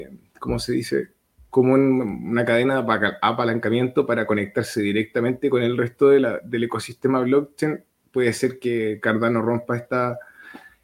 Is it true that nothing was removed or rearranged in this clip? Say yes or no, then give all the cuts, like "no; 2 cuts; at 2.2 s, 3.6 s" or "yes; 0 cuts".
yes; 0 cuts